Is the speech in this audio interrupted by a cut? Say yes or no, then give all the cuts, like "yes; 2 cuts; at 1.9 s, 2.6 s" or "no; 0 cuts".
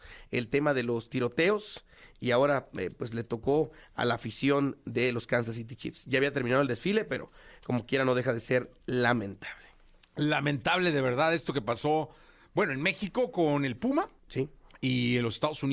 yes; 1 cut; at 14.2 s